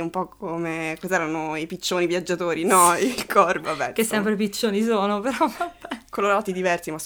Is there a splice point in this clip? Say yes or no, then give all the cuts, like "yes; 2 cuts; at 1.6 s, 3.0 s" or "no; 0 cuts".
yes; 1 cut; at 3.6 s